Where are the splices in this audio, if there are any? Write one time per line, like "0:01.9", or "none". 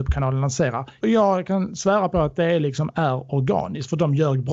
0:01.0

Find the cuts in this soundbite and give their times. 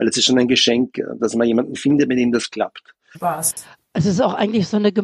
0:01.2
0:03.1

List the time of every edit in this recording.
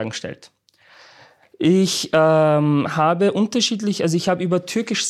none

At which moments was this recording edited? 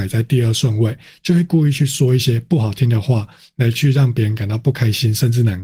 none

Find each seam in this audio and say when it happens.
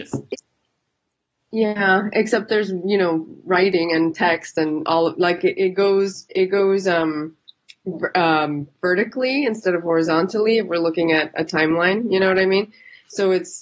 none

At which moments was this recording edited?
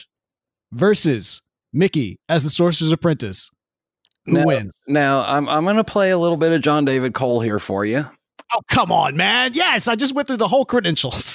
0:08.4

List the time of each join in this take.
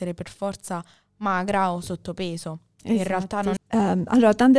0:03.6

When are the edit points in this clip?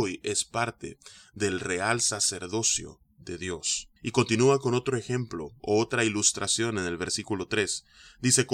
0:04.0

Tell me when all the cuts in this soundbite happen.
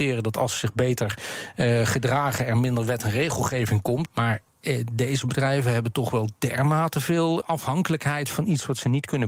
0:04.1
0:07.4

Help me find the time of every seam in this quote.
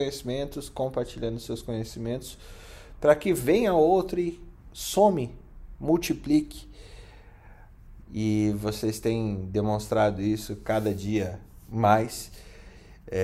0:08.0

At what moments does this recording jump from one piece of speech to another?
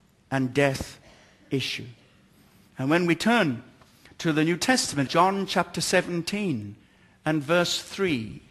0:05.1

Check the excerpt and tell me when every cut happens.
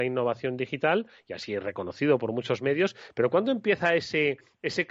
none

